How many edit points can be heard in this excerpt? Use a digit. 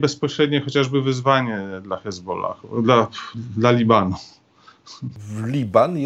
0